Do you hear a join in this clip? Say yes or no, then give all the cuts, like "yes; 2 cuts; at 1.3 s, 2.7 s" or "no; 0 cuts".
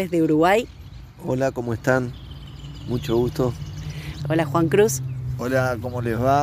yes; 1 cut; at 4.2 s